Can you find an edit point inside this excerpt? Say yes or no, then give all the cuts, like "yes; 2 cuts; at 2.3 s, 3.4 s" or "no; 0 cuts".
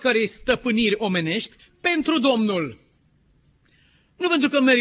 no; 0 cuts